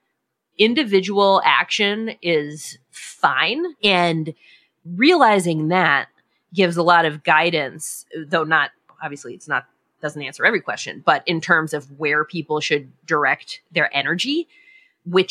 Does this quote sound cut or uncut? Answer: cut